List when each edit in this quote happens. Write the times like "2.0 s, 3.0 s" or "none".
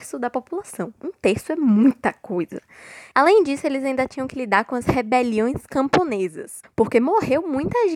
3.1 s, 6.6 s